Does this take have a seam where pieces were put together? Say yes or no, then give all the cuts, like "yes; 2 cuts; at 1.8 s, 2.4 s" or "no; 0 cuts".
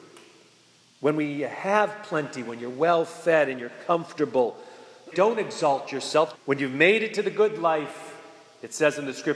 yes; 2 cuts; at 5.1 s, 6.3 s